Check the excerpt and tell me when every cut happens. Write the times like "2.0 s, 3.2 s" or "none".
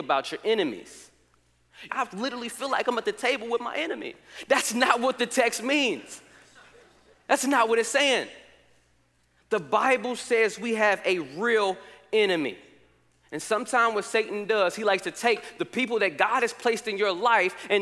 1.9 s